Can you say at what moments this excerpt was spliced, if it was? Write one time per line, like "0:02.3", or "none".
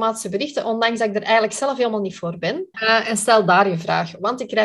0:02.7